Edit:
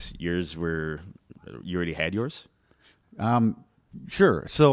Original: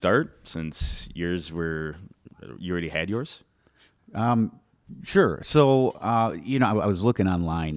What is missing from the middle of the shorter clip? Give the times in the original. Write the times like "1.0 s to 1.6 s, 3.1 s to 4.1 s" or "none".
none